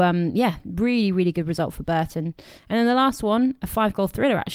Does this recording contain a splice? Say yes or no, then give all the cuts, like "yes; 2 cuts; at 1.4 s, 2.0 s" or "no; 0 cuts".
no; 0 cuts